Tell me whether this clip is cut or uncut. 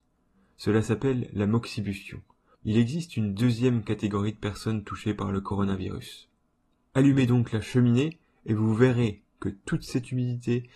cut